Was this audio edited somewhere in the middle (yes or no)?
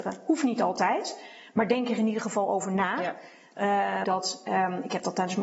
yes